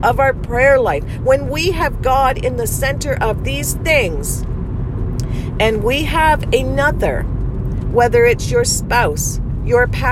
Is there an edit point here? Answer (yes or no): no